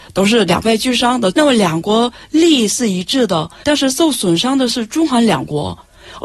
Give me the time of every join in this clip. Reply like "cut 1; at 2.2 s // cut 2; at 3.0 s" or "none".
cut 1; at 1.3 s // cut 2; at 3.6 s